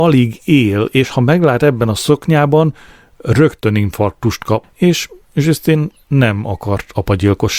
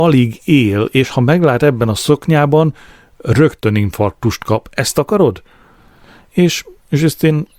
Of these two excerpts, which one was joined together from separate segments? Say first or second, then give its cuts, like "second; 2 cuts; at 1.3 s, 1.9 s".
first; 1 cut; at 4.6 s